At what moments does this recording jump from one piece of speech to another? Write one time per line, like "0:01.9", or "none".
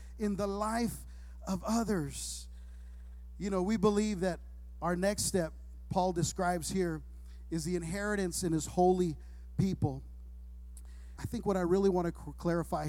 0:11.2